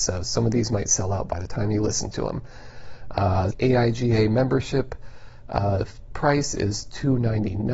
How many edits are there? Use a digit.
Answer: 1